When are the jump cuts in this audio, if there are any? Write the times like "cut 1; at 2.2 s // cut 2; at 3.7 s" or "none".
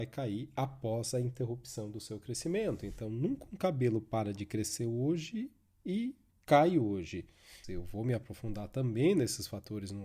cut 1; at 7.6 s